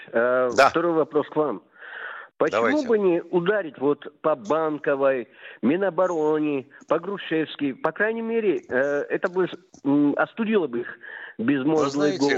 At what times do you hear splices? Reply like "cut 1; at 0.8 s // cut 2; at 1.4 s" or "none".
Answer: none